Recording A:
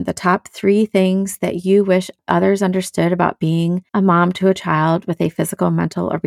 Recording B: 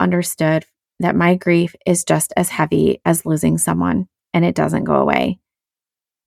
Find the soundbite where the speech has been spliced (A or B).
A